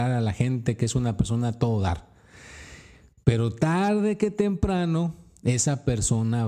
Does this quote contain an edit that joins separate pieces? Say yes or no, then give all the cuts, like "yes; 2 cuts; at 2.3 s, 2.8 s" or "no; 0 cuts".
no; 0 cuts